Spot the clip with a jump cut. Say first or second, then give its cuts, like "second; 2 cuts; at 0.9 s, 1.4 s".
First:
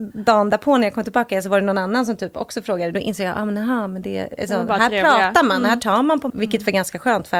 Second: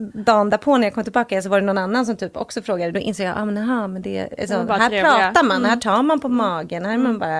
first; 1 cut; at 6.3 s